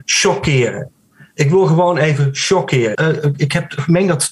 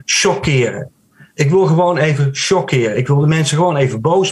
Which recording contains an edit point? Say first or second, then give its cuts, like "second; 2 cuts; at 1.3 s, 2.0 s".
first; 1 cut; at 2.9 s